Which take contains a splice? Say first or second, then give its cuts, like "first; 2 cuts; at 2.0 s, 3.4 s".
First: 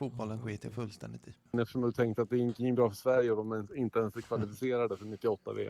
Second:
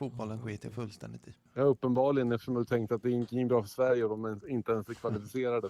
first; 1 cut; at 1.5 s